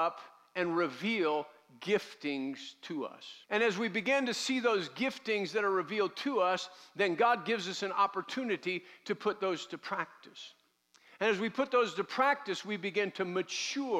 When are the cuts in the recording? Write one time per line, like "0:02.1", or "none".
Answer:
0:03.4